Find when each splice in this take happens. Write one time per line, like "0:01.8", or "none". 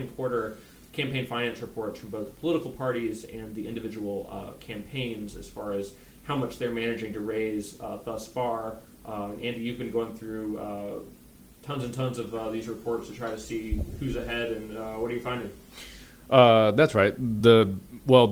none